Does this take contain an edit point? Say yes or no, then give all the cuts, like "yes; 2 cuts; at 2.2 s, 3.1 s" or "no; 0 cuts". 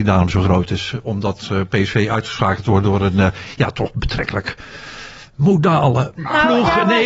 no; 0 cuts